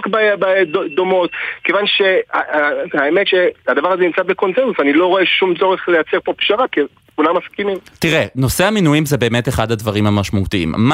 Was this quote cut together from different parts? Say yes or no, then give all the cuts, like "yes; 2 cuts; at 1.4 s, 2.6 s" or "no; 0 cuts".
no; 0 cuts